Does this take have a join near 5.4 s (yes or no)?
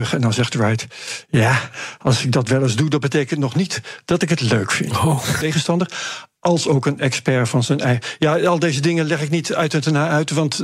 yes